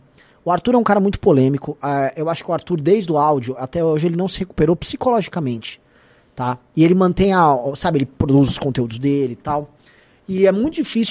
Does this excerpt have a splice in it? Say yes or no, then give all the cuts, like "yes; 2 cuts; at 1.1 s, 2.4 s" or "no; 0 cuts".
no; 0 cuts